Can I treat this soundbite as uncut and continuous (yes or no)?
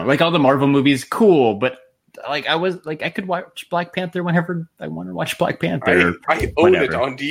yes